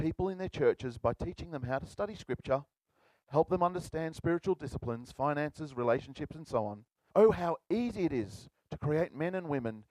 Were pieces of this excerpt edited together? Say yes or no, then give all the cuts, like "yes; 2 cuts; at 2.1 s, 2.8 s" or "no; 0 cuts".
yes; 1 cut; at 7.1 s